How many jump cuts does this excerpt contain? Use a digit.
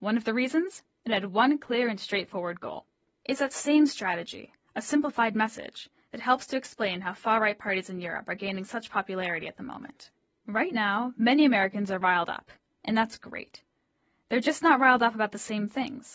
0